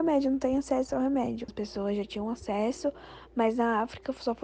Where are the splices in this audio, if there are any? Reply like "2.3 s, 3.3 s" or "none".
1.5 s

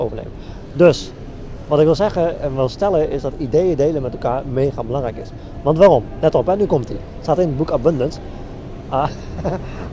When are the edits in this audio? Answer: 8.8 s

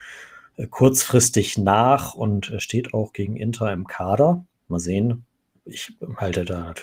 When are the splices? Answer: none

